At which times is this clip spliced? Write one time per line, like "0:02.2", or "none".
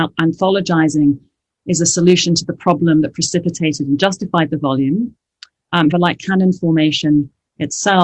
0:05.9

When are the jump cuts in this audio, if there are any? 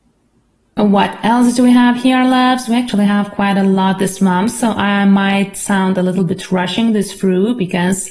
none

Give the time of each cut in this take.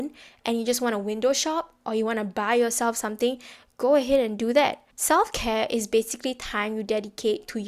0:04.9

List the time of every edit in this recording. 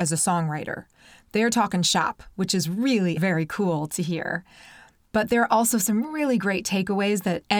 0:03.2

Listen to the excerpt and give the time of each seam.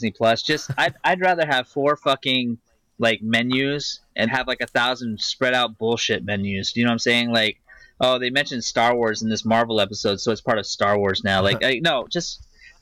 0:04.3

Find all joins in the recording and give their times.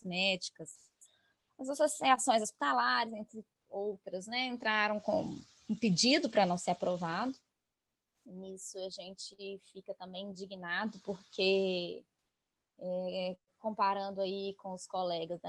none

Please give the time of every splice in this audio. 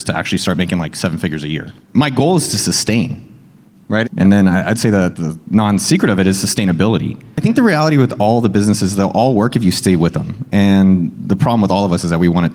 0:04.0

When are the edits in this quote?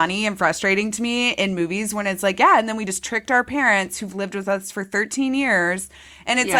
none

